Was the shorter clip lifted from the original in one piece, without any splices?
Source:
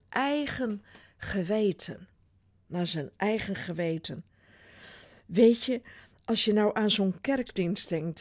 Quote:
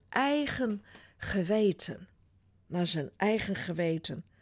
yes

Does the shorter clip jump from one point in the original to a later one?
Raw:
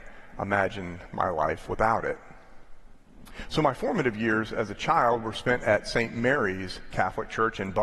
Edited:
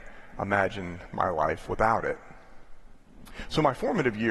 no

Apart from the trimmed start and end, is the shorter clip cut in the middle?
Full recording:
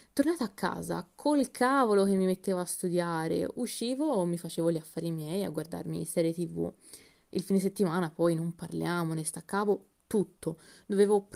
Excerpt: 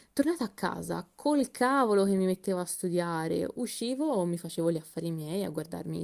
no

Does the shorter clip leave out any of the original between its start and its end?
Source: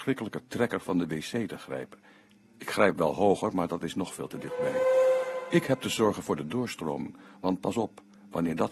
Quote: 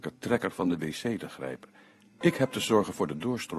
yes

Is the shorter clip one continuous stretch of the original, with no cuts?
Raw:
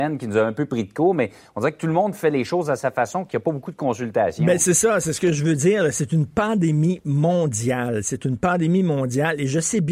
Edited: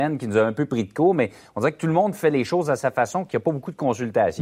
yes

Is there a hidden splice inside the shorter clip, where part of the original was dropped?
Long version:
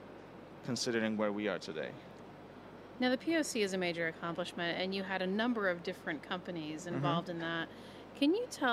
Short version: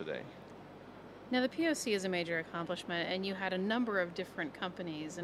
no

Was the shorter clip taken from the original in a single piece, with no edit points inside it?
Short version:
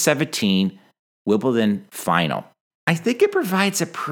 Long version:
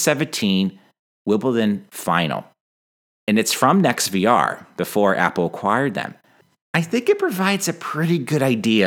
no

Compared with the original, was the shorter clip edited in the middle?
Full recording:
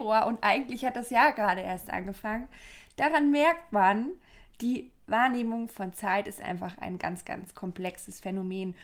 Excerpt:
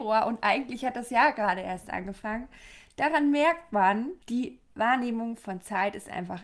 yes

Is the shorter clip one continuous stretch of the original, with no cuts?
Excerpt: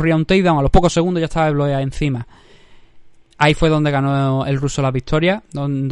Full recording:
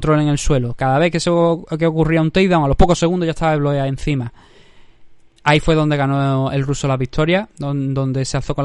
yes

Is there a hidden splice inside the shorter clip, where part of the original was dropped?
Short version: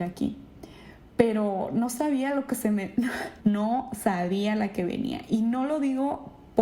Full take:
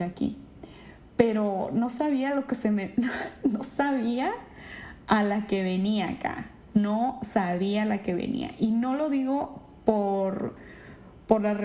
yes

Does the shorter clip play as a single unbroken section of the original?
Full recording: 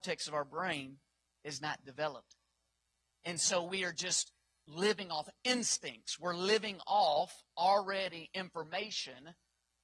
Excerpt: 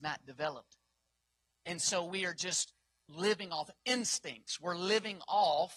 yes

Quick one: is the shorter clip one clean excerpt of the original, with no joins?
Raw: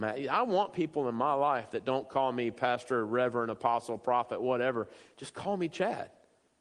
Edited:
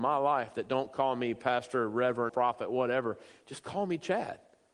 no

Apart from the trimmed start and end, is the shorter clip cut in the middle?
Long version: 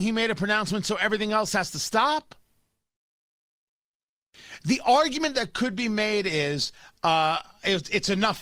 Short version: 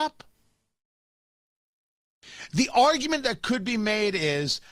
no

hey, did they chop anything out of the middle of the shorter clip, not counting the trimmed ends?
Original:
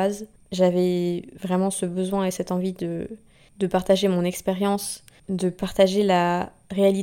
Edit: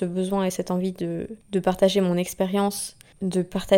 yes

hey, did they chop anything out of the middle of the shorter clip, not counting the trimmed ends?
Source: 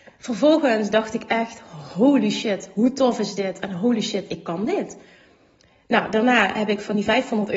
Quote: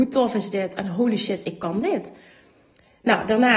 no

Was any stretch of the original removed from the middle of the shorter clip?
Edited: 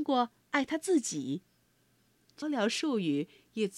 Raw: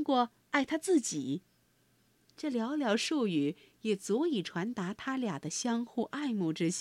yes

